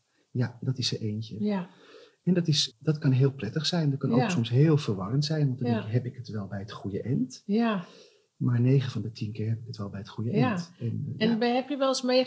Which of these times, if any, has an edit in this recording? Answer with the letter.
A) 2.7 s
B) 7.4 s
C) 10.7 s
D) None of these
A